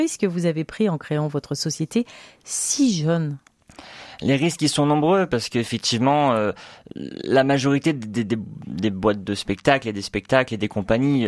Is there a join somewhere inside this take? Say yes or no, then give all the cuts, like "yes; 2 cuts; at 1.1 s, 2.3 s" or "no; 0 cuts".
no; 0 cuts